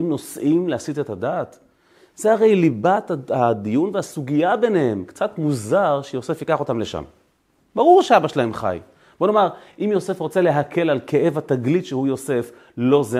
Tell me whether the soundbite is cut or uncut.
uncut